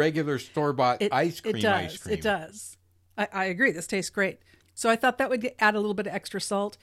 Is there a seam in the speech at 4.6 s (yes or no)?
yes